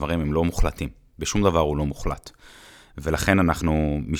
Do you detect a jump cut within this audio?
no; 0 cuts

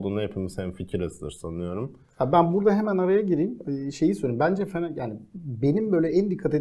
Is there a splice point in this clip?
no; 0 cuts

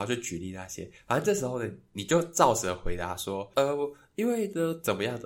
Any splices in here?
no; 0 cuts

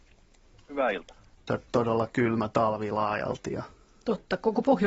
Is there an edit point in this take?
yes; 1 cut; at 1.5 s

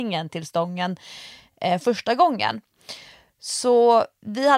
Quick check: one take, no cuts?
yes; 0 cuts

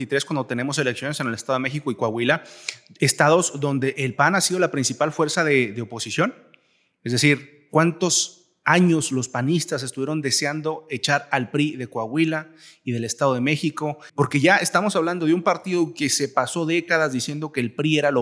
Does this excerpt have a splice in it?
yes; 1 cut; at 14.1 s

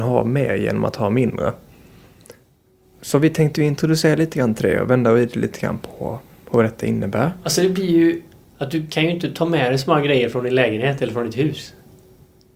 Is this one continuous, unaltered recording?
no; 1 cut; at 8.4 s

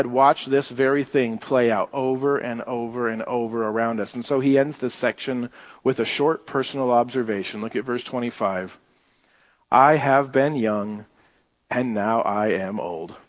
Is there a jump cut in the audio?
no; 0 cuts

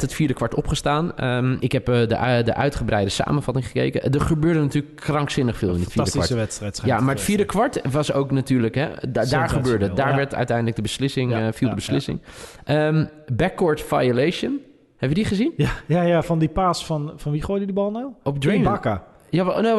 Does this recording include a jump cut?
yes; 1 cut; at 1.6 s

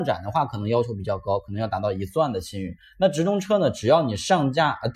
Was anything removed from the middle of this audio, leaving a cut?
no; 0 cuts

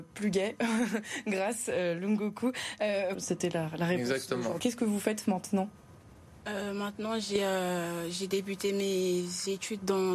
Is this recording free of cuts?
no; 2 cuts; at 3.1 s, 4.6 s

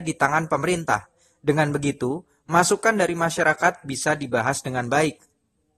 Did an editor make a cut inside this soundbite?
no; 0 cuts

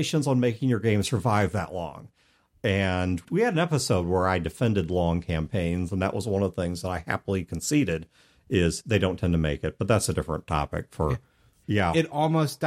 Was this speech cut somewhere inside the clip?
yes; 2 cuts; at 2.5 s, 11.6 s

